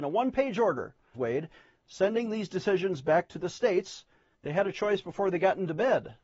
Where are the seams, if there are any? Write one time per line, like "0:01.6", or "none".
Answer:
0:01.1
0:04.3